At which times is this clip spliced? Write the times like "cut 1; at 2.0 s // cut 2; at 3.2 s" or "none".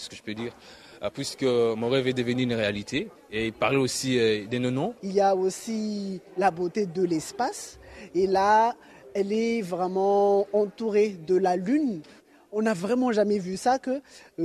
cut 1; at 3.1 s // cut 2; at 5.0 s